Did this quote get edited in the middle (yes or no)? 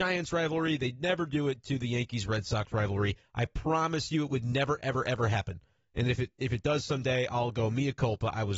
no